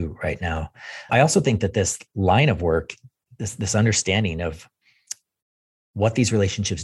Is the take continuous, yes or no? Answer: no